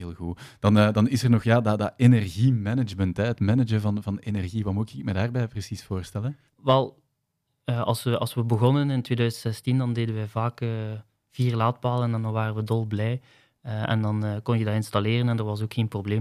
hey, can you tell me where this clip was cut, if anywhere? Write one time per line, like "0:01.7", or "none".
0:06.5